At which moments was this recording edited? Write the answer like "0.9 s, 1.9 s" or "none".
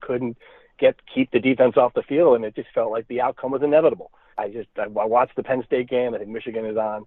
4.3 s